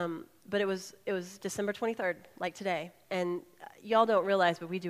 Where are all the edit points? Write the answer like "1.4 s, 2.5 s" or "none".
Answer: 3.1 s

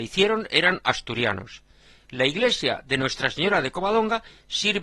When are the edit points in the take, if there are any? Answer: none

